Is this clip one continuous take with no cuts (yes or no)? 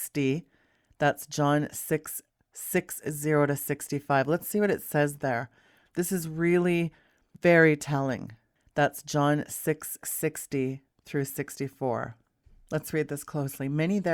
yes